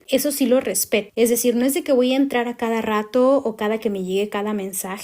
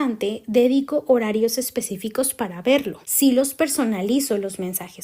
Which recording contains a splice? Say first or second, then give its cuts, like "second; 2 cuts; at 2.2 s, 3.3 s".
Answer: second; 1 cut; at 3.0 s